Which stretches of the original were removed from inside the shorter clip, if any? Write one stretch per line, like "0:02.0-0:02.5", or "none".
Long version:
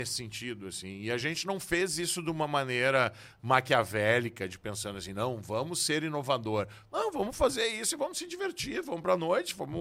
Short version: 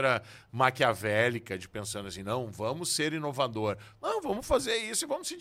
none